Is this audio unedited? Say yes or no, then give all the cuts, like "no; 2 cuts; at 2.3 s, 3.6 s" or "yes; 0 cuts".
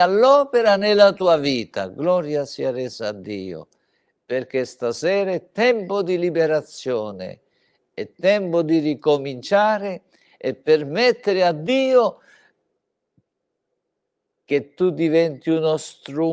yes; 0 cuts